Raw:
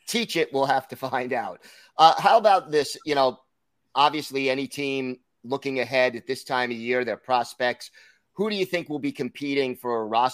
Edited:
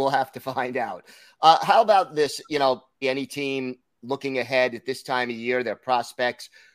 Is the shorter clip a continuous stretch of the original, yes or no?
no